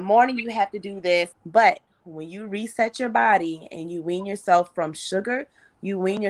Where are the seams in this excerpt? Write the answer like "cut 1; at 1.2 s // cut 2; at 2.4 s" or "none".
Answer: cut 1; at 1.3 s